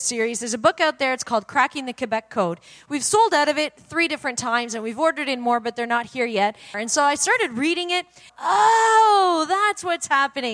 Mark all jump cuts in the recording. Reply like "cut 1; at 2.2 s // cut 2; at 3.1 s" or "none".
cut 1; at 6.7 s // cut 2; at 8.3 s